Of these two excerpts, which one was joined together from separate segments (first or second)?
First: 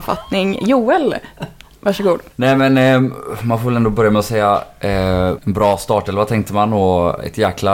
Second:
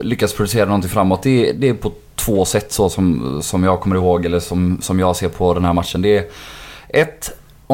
first